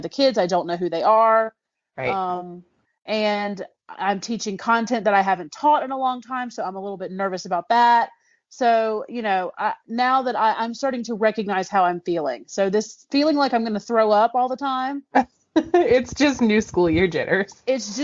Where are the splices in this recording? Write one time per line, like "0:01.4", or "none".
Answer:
none

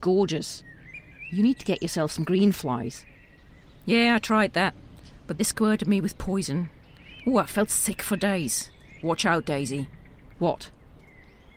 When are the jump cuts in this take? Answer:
0:05.4
0:09.0

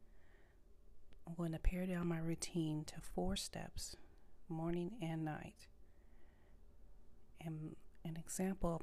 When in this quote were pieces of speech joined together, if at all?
none

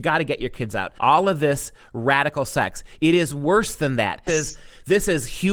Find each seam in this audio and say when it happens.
0:01.0
0:04.3

